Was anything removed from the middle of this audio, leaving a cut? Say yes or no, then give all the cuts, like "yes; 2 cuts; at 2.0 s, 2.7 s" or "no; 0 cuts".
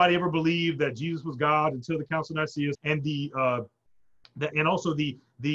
yes; 2 cuts; at 2.7 s, 4.5 s